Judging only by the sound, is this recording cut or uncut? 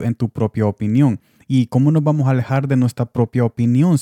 uncut